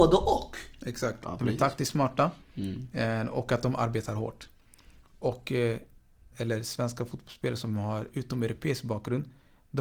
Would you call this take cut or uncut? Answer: cut